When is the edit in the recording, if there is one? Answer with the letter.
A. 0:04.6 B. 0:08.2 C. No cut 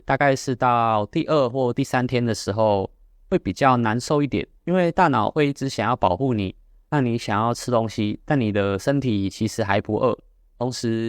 A